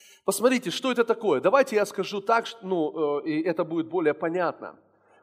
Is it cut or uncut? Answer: uncut